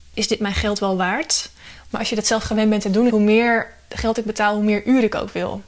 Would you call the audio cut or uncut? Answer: cut